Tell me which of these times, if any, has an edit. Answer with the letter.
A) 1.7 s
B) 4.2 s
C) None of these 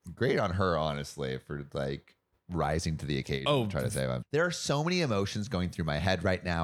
B